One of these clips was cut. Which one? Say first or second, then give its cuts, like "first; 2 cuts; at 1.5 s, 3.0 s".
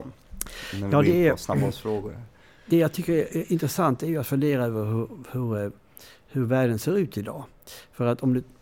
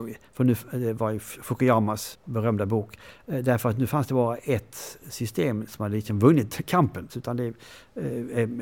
second; 2 cuts; at 2.1 s, 7.1 s